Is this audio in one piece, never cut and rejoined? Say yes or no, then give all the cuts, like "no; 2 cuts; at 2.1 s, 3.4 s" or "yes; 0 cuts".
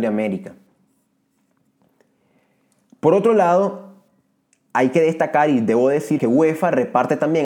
no; 1 cut; at 6.2 s